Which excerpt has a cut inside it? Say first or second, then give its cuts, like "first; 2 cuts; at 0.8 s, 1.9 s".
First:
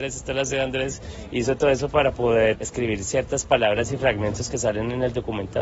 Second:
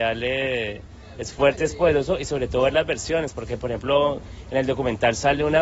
first; 1 cut; at 2.5 s